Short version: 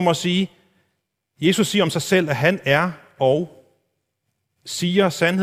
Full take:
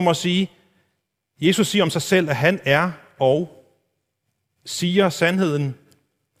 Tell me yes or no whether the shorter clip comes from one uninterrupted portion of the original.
yes